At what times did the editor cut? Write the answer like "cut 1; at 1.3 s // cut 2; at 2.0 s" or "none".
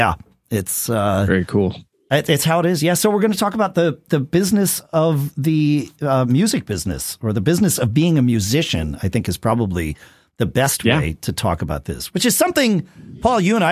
none